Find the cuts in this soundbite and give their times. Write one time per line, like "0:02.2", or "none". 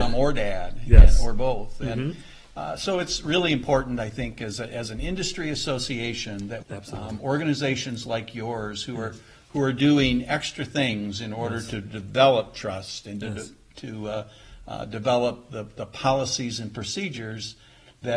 0:06.6